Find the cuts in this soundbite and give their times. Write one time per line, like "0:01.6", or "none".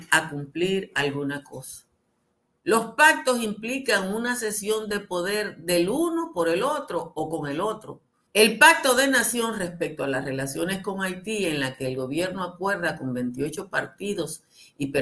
0:02.6
0:08.3